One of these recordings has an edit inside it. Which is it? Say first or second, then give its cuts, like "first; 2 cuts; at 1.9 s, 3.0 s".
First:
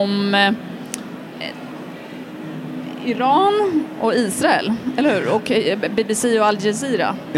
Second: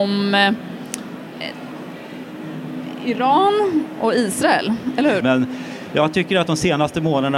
second; 1 cut; at 5.2 s